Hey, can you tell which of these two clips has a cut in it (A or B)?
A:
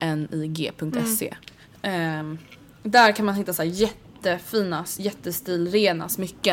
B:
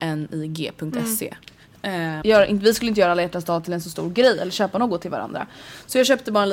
B